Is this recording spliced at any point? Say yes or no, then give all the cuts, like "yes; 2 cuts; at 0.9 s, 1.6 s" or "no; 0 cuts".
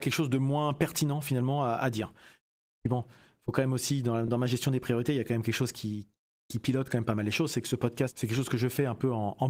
no; 0 cuts